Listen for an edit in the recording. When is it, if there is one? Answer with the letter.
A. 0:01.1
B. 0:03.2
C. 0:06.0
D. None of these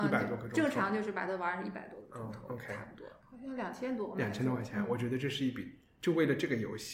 B